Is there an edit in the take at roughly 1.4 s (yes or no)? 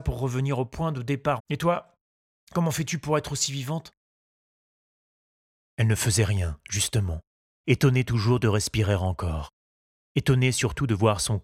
yes